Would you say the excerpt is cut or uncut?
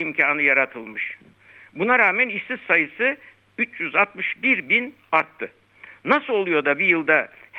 uncut